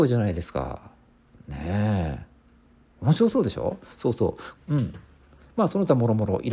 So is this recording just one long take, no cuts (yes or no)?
no